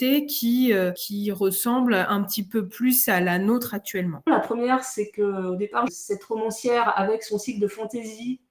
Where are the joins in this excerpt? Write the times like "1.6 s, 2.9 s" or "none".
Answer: 4.3 s, 5.9 s